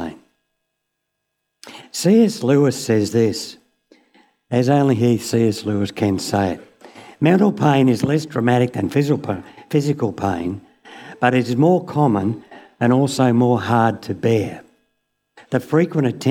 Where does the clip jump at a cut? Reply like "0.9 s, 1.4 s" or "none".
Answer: 1.8 s